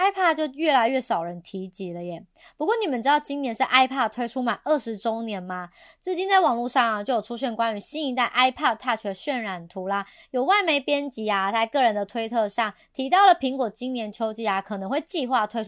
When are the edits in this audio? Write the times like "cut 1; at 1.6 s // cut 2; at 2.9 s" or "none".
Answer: none